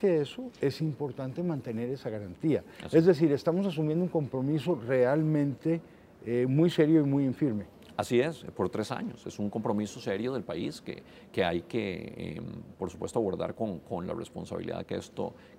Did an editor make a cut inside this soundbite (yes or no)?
no